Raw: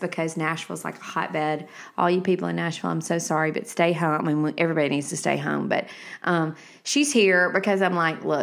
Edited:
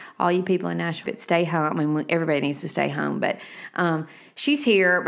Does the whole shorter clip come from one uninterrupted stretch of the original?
no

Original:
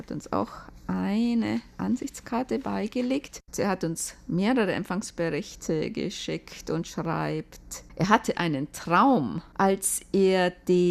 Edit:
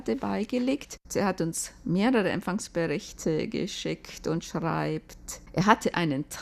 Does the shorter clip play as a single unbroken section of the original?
yes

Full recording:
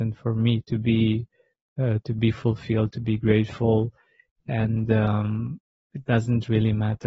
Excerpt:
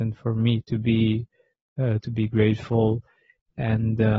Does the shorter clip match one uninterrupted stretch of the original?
no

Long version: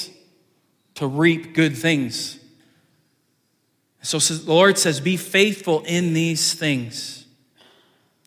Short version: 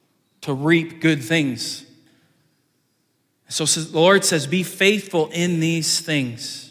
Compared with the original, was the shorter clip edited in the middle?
no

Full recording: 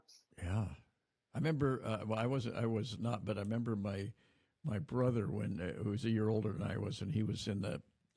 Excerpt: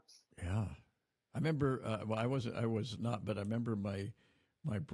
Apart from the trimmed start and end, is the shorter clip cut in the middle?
no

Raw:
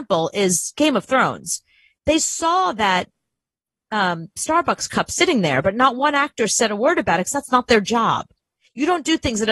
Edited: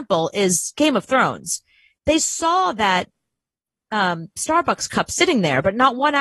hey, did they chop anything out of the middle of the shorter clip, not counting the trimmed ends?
no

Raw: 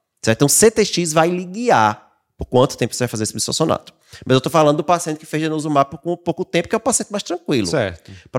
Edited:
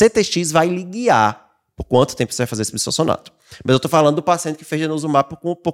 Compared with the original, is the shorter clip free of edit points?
yes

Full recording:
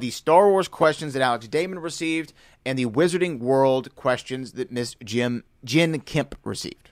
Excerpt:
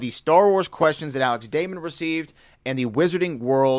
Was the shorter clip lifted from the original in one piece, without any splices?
yes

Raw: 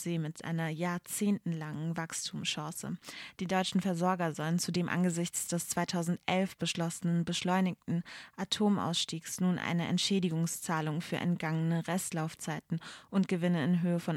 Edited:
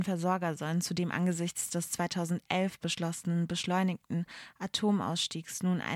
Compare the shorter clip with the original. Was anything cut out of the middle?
no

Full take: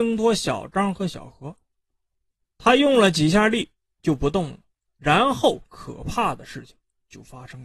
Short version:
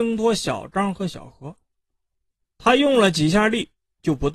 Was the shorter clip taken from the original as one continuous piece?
yes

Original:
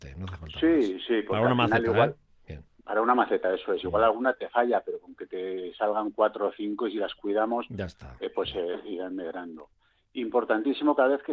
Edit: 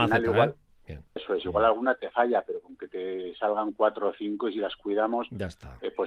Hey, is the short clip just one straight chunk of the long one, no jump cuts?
no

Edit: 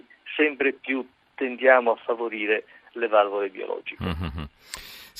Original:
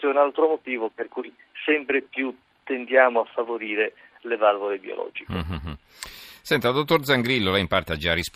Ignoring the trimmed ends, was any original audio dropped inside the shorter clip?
no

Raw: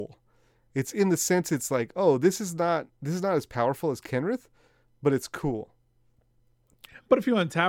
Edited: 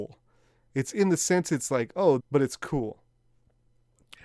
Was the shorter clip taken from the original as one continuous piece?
no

